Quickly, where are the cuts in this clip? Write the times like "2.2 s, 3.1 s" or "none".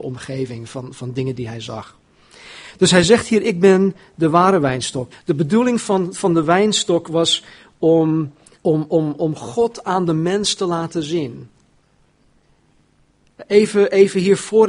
5.1 s, 8.5 s